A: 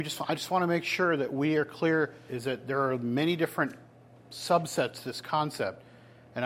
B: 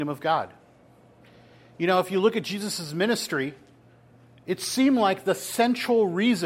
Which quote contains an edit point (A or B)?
A